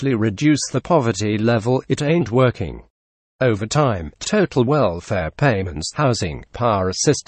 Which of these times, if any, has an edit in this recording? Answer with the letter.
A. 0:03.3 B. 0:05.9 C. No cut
A